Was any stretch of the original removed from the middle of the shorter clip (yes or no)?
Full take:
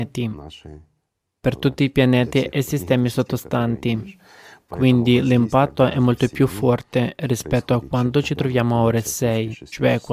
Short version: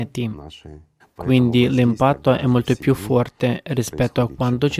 yes